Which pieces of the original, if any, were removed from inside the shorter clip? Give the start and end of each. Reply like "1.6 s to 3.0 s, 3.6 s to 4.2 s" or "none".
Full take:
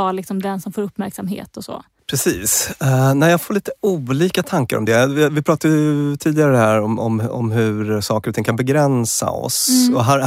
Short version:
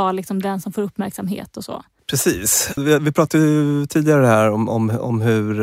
2.8 s to 5.1 s